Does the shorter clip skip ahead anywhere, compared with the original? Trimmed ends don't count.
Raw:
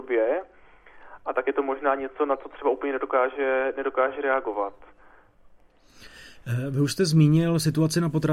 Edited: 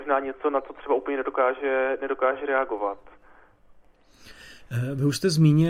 no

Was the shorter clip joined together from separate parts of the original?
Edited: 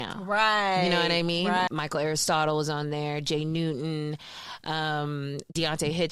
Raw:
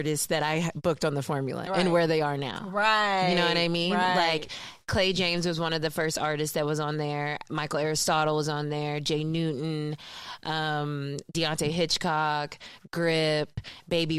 yes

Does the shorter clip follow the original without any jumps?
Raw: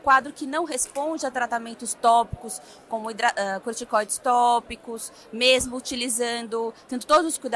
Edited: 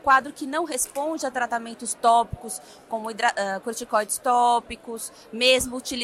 yes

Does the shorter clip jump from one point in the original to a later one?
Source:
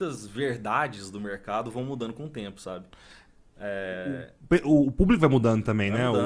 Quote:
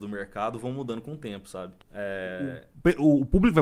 yes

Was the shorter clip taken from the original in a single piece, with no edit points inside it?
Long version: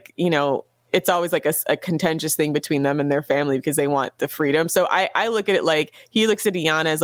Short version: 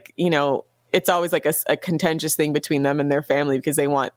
yes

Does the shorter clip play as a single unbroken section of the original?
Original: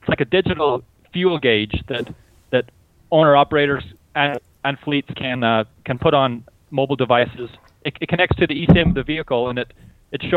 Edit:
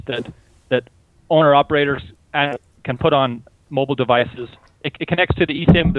no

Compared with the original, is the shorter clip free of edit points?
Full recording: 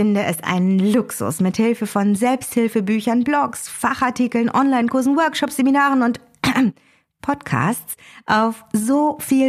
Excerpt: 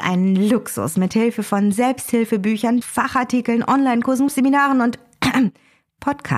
no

